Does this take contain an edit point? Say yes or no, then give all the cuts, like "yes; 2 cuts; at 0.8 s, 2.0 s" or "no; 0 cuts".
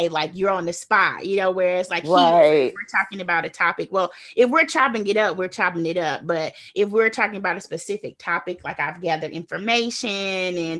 no; 0 cuts